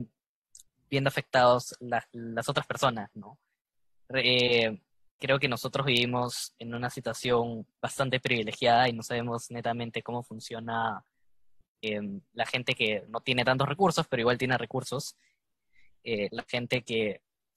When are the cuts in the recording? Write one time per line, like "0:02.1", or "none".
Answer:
0:13.1
0:16.3